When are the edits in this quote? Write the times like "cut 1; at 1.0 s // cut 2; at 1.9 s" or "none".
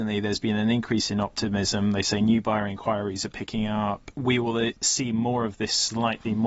cut 1; at 4.1 s